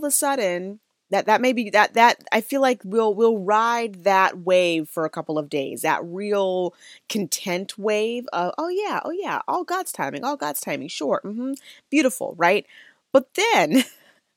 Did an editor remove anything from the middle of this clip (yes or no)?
no